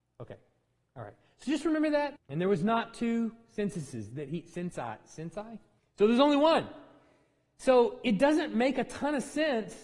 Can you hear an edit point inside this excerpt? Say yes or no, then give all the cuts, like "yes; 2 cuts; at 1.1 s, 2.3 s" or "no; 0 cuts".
yes; 2 cuts; at 2.2 s, 5.8 s